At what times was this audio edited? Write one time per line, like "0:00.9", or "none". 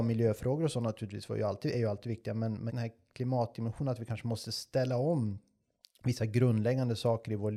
0:02.7